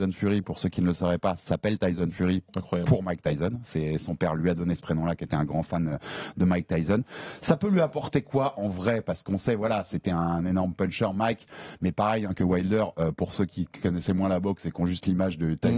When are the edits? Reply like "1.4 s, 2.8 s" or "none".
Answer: none